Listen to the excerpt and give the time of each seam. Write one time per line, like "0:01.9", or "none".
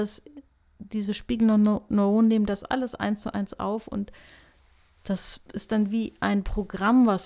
none